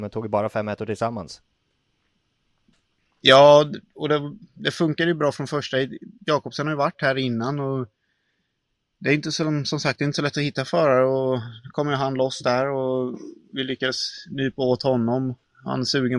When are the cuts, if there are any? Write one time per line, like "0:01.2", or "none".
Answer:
none